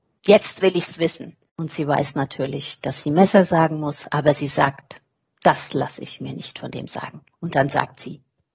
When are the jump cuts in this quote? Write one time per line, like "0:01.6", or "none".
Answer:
0:01.5
0:07.3